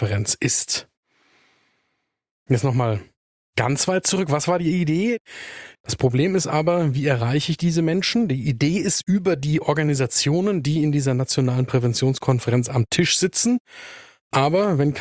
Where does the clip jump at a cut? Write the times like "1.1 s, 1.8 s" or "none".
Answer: 5.7 s